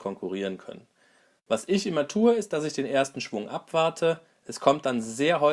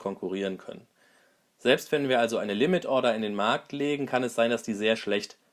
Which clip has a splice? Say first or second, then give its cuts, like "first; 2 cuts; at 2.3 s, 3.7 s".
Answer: first; 1 cut; at 1.4 s